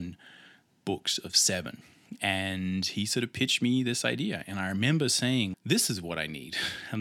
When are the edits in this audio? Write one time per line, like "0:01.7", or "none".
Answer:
0:05.5